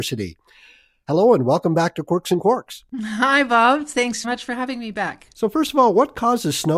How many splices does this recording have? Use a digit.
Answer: 1